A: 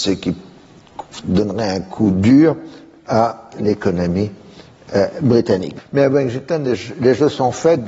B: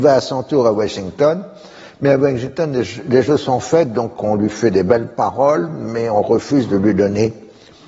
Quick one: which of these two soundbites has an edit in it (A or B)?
A